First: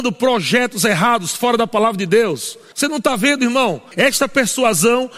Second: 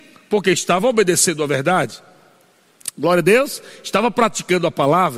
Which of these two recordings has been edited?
first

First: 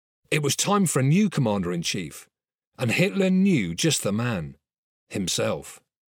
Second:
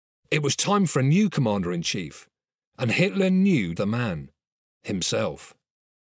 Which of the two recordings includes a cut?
second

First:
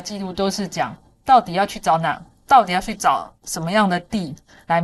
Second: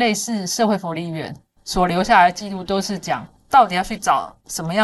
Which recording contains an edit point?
second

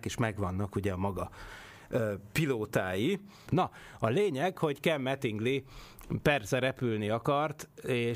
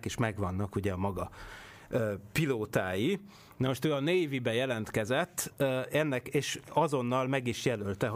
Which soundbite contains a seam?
first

